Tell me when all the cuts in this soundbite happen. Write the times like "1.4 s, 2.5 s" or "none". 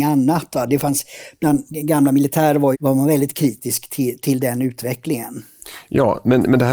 2.7 s